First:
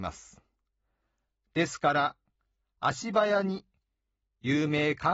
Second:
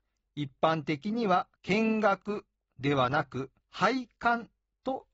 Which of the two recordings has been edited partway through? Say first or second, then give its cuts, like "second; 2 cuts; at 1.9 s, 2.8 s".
second; 2 cuts; at 1.6 s, 3.6 s